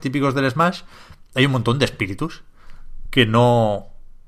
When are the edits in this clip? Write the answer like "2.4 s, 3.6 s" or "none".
none